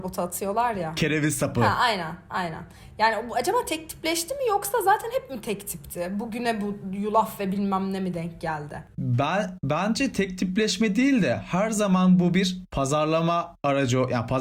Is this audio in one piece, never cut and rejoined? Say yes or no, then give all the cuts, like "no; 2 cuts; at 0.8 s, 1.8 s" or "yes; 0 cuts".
yes; 0 cuts